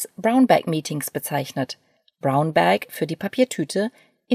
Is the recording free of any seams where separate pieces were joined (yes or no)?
yes